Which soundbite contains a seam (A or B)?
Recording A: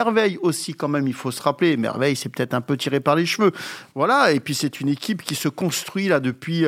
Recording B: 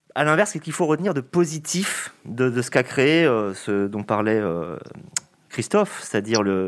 A